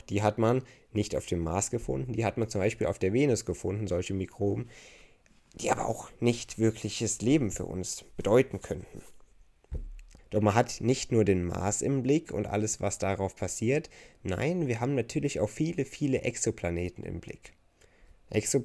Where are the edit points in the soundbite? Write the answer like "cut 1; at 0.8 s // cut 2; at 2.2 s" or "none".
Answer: cut 1; at 10.2 s